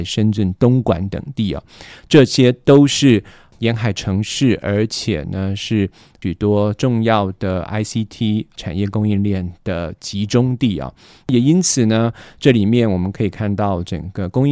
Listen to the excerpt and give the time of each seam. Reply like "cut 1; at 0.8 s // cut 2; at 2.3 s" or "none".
none